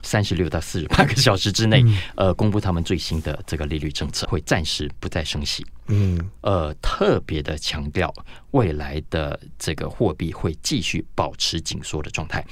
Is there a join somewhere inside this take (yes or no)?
yes